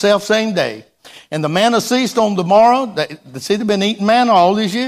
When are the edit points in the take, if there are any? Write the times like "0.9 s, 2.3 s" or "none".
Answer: none